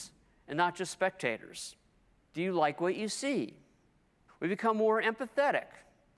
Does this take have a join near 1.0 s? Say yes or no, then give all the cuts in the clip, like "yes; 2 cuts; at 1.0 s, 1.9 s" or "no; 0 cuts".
no; 2 cuts; at 2.3 s, 4.3 s